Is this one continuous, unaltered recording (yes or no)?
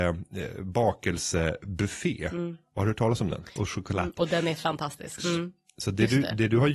no